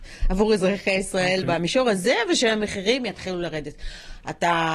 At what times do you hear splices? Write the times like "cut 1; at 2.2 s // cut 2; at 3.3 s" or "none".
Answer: none